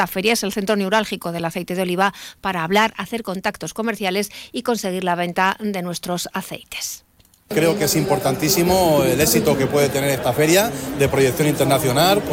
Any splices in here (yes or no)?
no